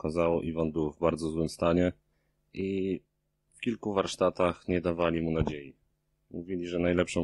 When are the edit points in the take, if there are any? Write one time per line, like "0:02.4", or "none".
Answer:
none